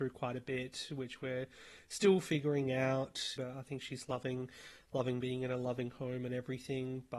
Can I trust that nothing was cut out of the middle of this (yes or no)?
no